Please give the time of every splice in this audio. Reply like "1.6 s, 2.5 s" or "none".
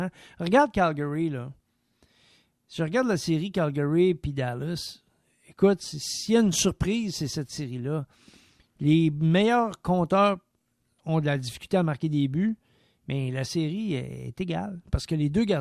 none